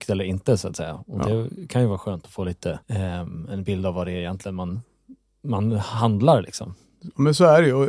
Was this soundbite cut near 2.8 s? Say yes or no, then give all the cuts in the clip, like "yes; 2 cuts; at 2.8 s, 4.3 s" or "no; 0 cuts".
yes; 1 cut; at 2.8 s